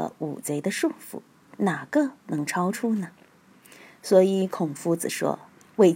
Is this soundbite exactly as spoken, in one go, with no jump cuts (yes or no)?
yes